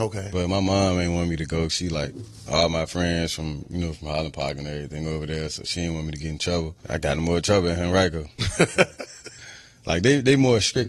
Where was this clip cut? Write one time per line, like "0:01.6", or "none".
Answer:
0:06.8